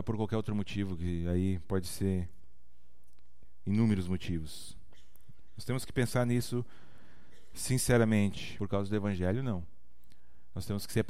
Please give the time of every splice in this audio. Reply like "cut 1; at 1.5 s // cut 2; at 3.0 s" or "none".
cut 1; at 8.6 s